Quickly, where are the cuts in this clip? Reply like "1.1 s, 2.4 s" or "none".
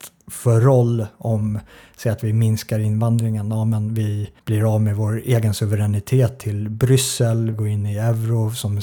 4.4 s, 7.5 s